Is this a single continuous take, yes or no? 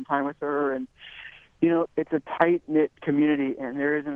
no